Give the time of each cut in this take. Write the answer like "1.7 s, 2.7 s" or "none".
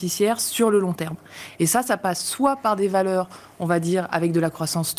none